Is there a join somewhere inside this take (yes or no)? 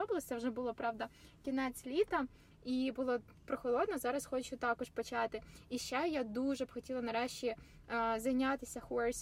no